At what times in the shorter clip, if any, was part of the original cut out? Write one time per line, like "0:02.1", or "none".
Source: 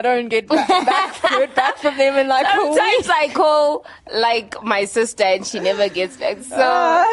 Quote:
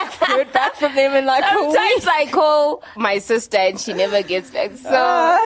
0:03.0